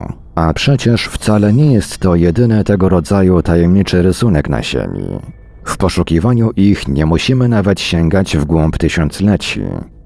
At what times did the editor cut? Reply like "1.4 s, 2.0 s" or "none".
none